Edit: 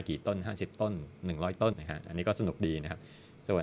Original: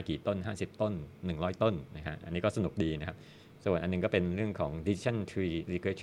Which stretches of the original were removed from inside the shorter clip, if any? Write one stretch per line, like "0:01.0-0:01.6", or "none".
0:01.7-0:01.9

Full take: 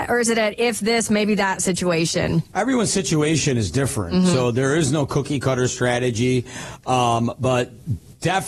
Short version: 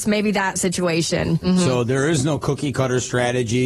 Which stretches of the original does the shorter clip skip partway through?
0:02.4-0:04.1

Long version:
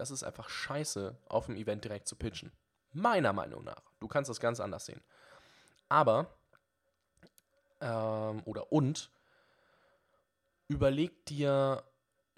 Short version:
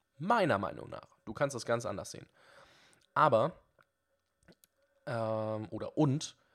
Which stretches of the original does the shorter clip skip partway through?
none

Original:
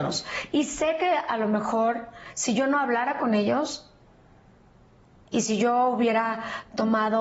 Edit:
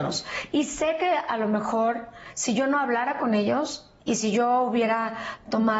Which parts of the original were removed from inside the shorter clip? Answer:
0:04.0-0:05.3

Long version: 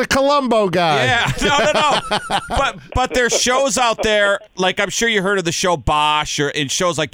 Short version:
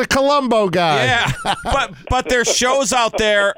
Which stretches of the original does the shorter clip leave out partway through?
0:01.4-0:02.2

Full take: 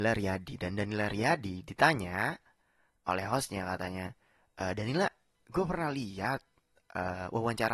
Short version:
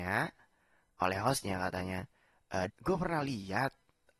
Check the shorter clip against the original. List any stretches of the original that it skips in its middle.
0:04.8-0:05.4

